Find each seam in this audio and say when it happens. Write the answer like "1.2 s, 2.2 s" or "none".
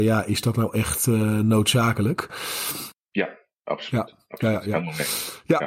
2.9 s